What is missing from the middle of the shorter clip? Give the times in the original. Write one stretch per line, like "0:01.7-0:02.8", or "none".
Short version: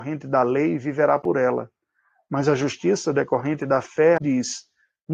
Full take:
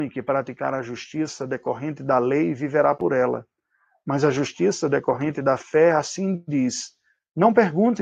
0:05.9-0:06.4